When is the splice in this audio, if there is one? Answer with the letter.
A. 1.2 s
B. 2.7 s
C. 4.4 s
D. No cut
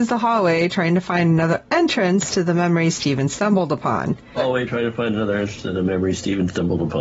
C